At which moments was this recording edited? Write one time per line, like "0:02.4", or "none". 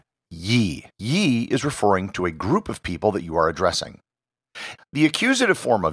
0:00.9
0:04.8